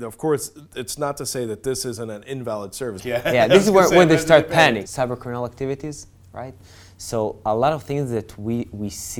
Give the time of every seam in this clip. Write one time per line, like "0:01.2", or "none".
0:03.0
0:04.8